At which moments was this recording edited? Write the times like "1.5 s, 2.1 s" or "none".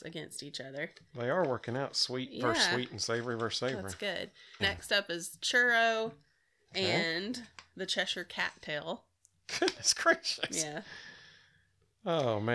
4.6 s